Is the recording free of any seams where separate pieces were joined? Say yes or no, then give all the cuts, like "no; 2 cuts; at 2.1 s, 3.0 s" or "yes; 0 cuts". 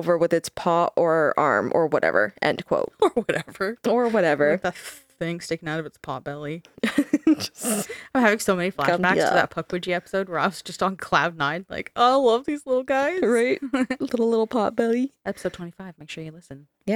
yes; 0 cuts